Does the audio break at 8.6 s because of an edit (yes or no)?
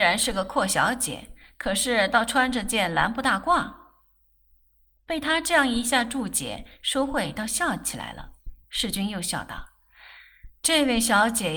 yes